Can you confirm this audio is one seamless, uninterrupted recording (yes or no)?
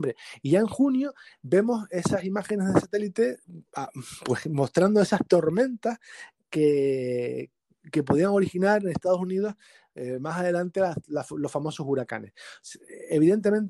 yes